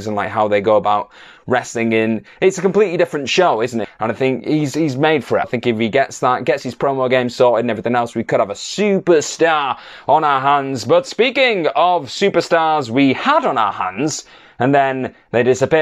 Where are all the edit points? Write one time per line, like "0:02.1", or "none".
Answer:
0:03.8
0:05.4